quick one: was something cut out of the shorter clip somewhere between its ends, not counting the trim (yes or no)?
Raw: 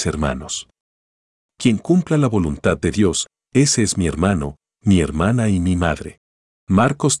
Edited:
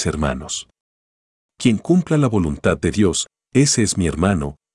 no